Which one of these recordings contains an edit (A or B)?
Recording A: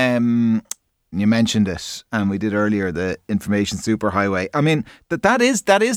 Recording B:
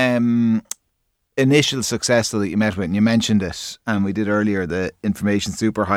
A